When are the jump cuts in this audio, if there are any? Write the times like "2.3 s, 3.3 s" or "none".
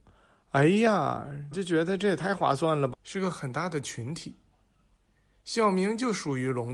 1.5 s, 2.9 s